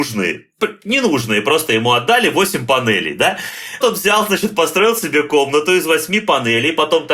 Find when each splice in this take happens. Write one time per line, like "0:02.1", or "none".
0:03.8